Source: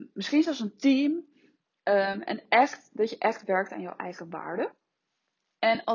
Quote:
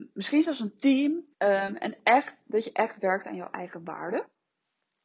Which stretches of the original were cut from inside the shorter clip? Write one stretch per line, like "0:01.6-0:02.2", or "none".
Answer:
0:01.3-0:01.8